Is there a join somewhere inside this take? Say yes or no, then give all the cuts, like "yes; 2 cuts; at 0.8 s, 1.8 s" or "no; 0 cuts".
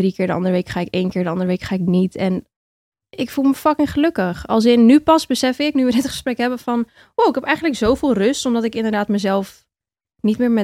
no; 0 cuts